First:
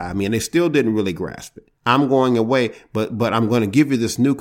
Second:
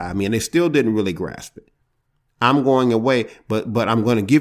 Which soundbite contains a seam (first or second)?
first